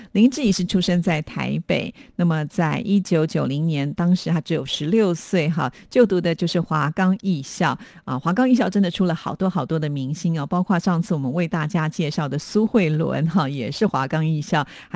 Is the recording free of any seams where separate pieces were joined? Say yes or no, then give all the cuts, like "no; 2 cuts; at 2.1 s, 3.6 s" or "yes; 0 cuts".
yes; 0 cuts